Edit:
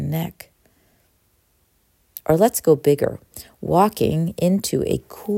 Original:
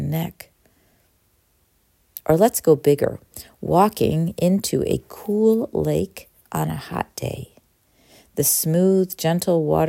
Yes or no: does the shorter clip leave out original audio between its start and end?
no